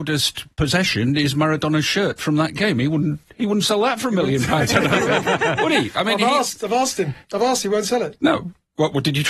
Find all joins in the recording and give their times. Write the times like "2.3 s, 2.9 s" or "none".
none